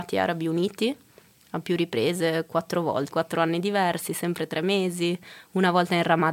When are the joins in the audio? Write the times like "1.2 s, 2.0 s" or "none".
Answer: 3.1 s